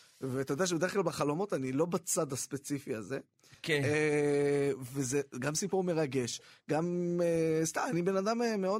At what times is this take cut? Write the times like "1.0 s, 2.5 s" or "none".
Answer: none

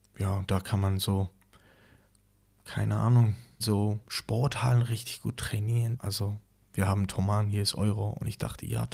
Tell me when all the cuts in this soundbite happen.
3.6 s, 6.0 s

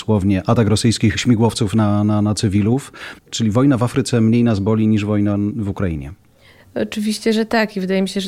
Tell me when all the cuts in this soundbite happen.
3.2 s

